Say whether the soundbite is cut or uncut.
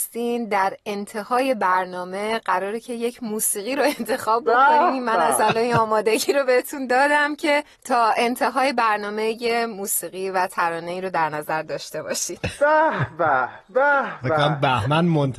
cut